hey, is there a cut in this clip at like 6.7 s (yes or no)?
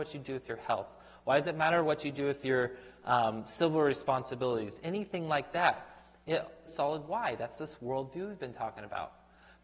yes